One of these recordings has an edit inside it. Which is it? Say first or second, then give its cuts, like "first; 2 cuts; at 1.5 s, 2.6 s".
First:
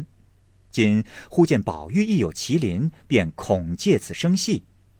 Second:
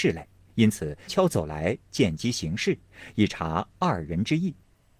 second; 1 cut; at 1.1 s